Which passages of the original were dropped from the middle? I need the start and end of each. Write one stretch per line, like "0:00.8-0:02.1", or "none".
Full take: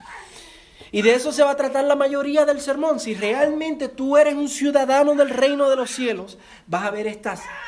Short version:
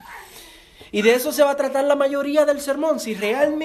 none